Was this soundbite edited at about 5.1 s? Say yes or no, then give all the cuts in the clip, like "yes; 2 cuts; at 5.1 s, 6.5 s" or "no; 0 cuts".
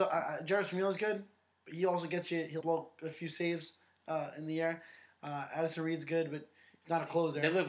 no; 1 cut; at 2.6 s